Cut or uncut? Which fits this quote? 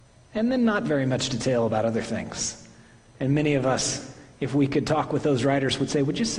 uncut